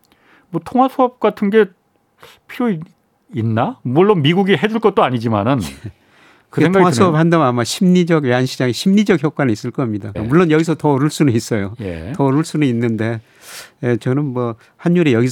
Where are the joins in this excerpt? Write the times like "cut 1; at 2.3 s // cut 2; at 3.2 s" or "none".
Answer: cut 1; at 10.1 s